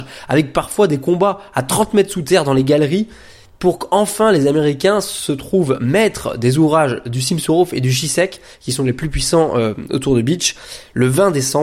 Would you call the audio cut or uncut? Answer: uncut